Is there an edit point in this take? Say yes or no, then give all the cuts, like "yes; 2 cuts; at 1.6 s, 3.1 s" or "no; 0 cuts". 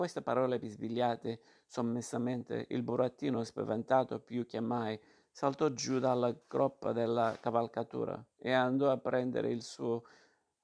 no; 0 cuts